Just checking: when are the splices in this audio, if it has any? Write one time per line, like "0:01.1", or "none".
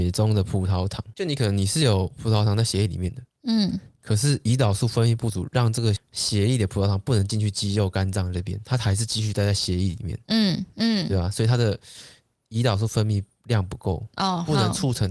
0:06.0